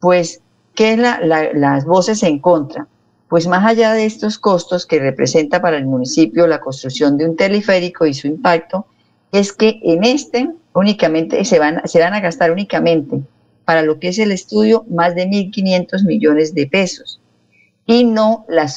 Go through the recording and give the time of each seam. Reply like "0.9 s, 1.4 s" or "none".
none

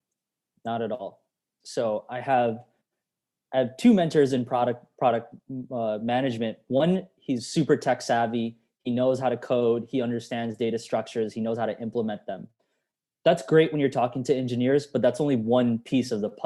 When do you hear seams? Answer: 1.6 s

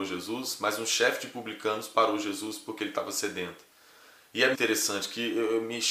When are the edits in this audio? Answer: 4.5 s

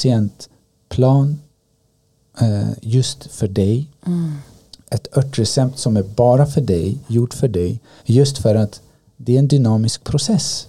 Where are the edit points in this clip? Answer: 8.0 s

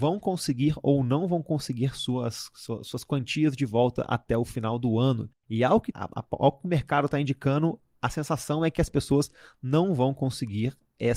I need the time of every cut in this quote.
5.9 s

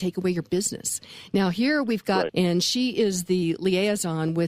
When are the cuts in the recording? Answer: 2.3 s

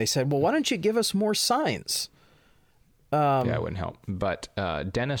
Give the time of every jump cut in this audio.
4.0 s

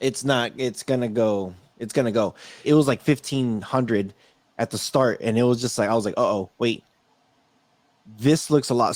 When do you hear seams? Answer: 2.6 s

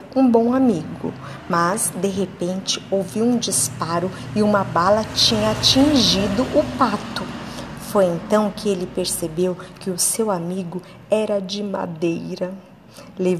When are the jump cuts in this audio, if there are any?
none

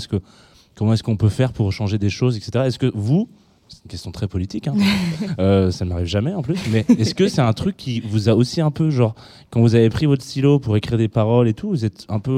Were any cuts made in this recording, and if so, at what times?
none

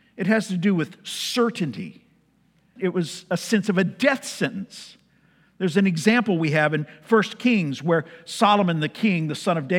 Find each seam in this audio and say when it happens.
2.8 s

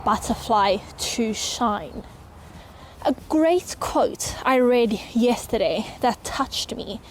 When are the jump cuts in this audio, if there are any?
2.9 s

